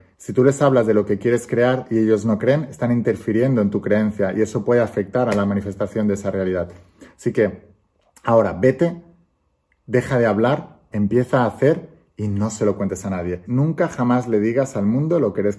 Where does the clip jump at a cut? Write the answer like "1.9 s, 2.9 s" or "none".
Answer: 10.9 s, 13.4 s